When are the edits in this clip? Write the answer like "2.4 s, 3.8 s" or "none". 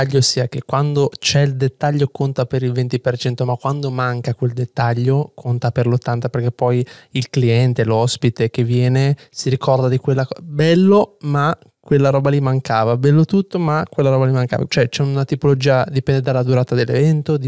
14.7 s